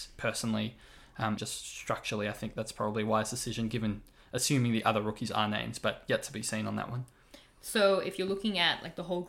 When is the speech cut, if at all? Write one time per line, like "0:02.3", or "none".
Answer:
0:01.4